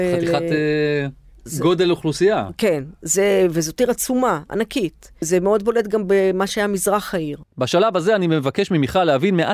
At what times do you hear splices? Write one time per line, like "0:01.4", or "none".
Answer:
none